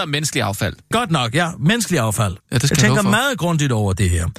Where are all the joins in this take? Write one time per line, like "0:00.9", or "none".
0:00.9
0:02.4